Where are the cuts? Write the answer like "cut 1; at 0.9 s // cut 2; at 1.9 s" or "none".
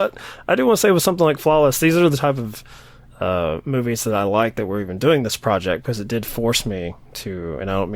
none